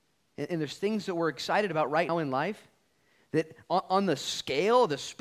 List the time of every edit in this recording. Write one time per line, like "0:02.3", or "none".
0:02.1